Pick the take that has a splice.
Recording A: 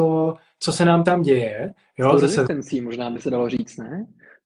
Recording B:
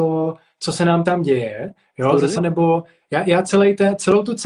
B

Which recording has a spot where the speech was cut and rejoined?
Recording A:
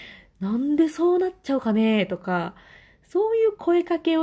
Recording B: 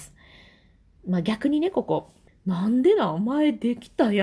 B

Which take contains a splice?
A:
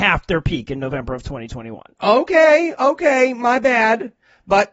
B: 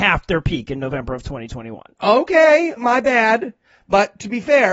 B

